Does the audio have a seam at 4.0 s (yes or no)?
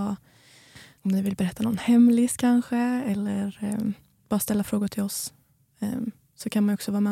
no